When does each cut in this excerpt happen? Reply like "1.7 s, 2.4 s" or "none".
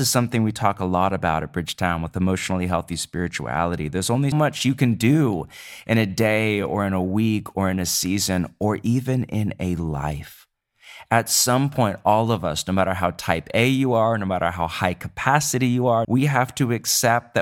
4.3 s, 16.0 s